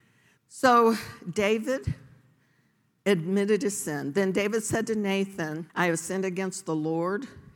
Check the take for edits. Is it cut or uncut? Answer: cut